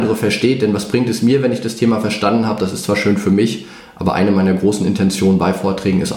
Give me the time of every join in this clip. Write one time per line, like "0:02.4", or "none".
none